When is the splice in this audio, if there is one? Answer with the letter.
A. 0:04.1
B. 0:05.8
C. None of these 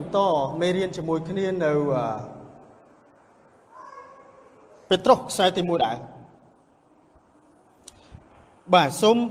B